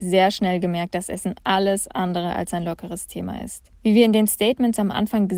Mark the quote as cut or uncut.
cut